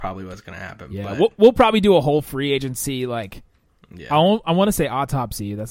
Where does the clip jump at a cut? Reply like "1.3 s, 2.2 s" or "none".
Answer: none